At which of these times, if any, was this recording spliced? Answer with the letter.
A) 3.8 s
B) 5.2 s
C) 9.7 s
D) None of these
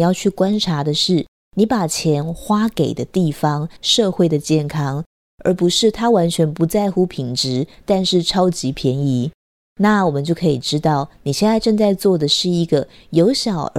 A